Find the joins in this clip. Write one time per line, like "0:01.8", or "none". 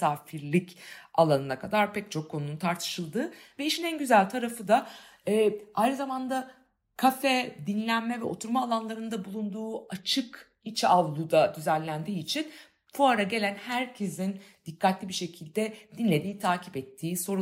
none